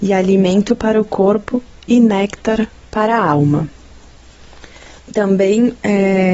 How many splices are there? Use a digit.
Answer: 1